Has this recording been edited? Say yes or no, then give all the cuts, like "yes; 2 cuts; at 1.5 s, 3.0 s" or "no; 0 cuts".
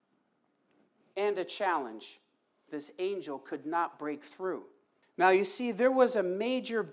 yes; 2 cuts; at 2.7 s, 5.0 s